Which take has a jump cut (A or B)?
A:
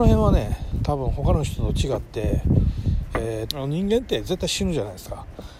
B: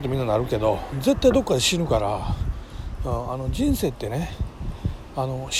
A